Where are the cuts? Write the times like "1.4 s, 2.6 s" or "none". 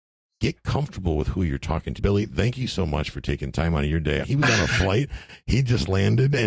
2.0 s, 4.2 s